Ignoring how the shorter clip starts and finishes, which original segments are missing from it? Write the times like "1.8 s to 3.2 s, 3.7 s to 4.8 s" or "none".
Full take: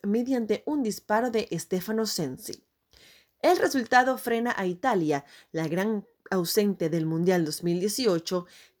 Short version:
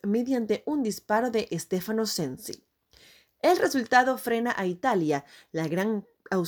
none